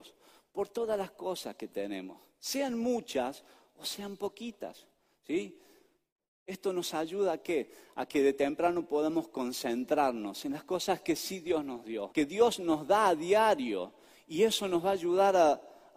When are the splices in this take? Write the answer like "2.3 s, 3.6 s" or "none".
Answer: 12.1 s